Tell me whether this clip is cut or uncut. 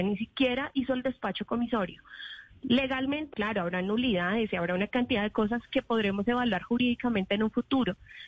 cut